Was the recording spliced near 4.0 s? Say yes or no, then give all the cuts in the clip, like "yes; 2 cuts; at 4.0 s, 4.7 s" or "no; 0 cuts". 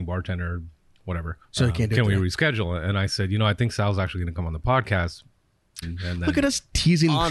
no; 2 cuts; at 1.4 s, 5.8 s